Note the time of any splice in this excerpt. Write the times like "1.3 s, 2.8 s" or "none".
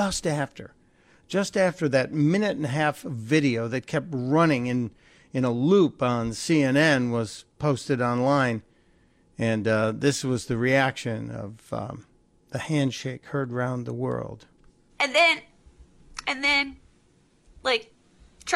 none

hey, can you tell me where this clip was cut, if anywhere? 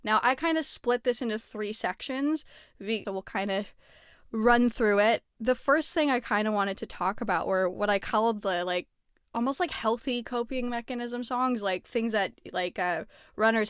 3.0 s

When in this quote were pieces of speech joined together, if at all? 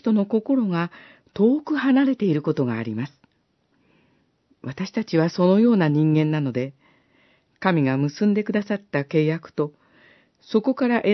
none

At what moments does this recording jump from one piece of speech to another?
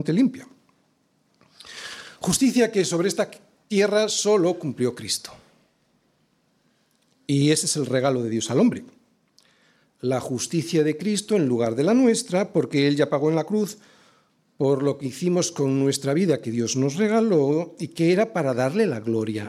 none

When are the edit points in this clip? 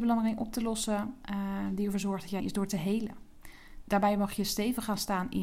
2.4 s, 3.8 s

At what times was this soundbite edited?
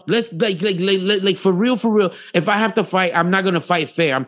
2.3 s

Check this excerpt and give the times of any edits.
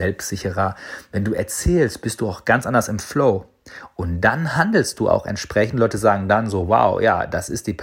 none

